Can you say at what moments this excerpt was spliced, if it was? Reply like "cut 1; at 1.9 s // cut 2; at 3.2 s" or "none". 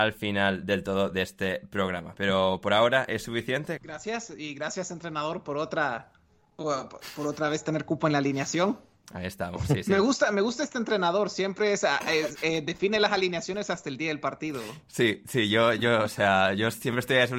cut 1; at 3.8 s

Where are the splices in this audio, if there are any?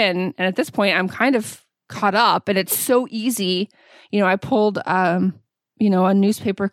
none

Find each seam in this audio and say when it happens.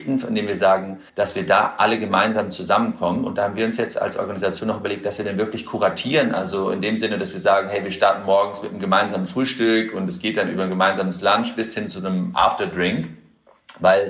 cut 1; at 1.1 s

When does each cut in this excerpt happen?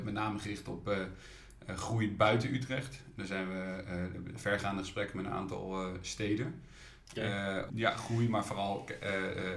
cut 1; at 7.7 s

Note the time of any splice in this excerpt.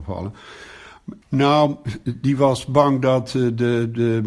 cut 1; at 1.2 s

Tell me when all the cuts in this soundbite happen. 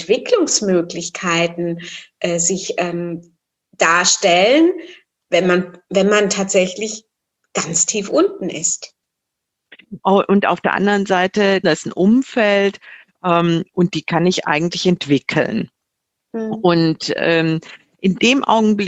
cut 1; at 10.0 s // cut 2; at 11.6 s

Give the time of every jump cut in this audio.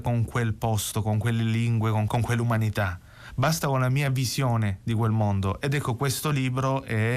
cut 1; at 2.1 s

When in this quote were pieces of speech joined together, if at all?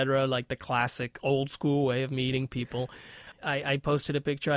cut 1; at 3.3 s

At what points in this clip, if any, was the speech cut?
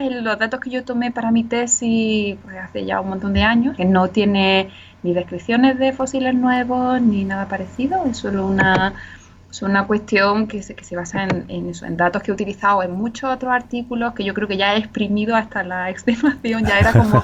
cut 1; at 3.8 s

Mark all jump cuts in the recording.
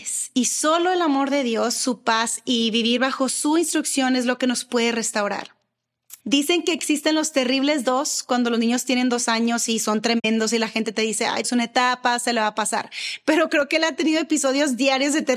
cut 1; at 1.8 s // cut 2; at 6.2 s // cut 3; at 11.4 s

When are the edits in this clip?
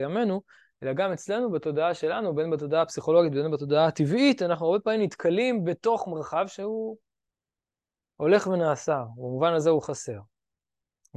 none

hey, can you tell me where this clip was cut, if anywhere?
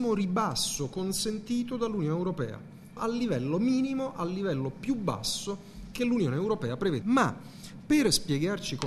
cut 1; at 3.0 s // cut 2; at 7.0 s

